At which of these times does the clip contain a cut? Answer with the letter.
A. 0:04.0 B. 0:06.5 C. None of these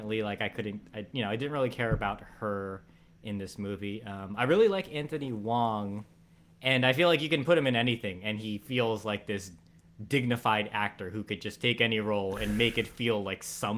C